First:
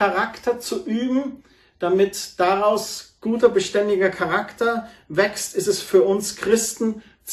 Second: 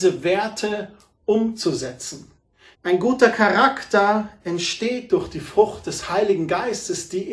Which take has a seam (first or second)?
second